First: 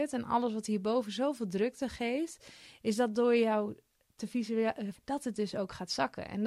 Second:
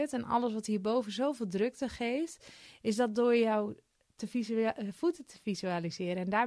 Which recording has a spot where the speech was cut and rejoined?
first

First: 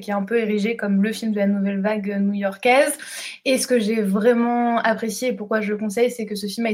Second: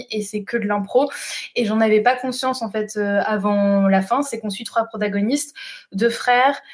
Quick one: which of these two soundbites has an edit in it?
second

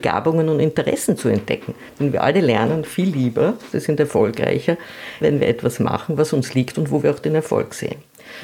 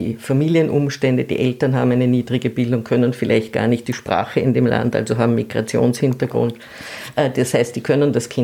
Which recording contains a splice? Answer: first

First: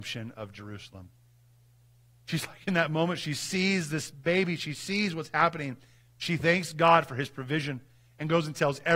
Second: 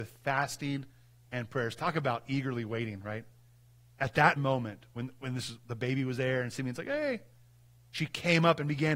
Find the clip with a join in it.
second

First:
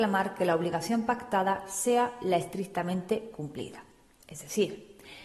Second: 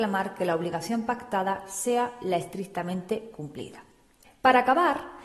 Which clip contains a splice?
second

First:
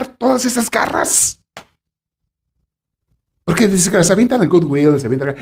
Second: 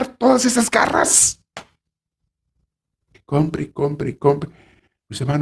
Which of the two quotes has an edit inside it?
second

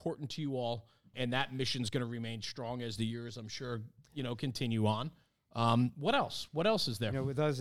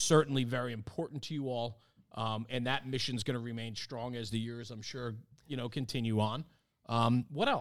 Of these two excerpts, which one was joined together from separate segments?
first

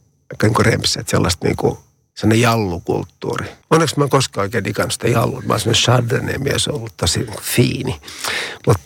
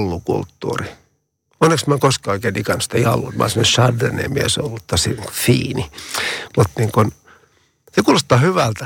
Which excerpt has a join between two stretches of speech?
first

